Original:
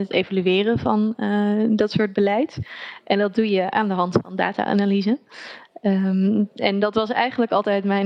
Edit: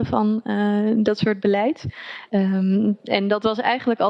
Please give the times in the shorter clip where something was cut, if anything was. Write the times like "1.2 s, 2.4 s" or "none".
2.3 s